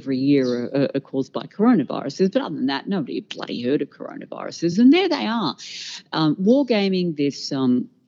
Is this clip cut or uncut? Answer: uncut